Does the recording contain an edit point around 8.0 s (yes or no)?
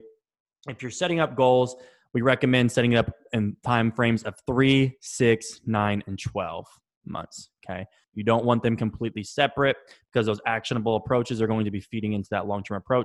yes